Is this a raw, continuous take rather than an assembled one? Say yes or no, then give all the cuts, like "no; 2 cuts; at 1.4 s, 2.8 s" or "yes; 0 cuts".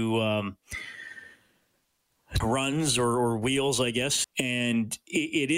no; 2 cuts; at 2.4 s, 4.2 s